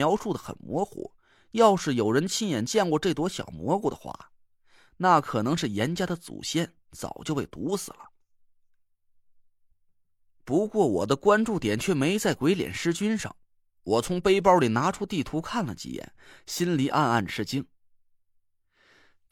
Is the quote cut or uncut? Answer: uncut